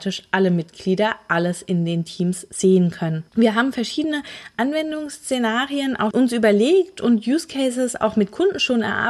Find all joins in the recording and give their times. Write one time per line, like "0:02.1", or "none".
0:03.3
0:06.1